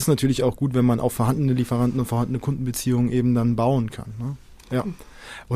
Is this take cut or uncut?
uncut